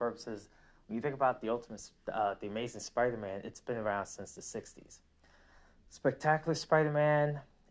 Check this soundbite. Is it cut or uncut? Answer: uncut